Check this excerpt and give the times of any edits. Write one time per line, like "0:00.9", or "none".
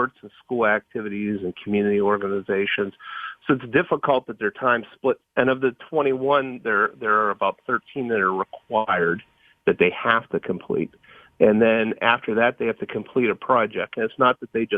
0:05.2